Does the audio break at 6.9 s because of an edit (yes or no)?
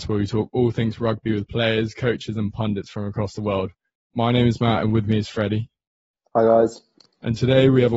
no